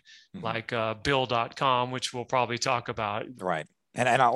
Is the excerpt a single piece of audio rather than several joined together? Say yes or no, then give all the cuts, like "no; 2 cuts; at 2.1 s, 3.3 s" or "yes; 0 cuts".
no; 1 cut; at 3.3 s